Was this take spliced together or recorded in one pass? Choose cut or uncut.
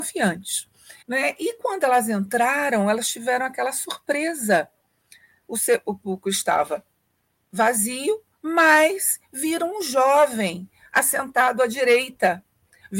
cut